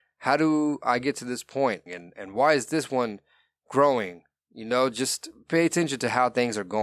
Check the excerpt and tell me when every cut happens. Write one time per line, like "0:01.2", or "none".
0:01.9